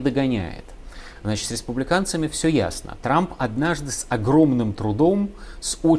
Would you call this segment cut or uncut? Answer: uncut